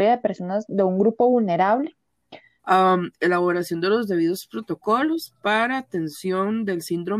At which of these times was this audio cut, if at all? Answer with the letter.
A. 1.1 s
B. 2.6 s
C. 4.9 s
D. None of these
B